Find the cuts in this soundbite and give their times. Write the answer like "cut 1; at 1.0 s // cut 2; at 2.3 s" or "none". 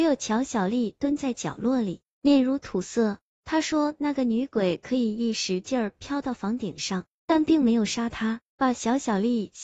cut 1; at 3.3 s // cut 2; at 8.4 s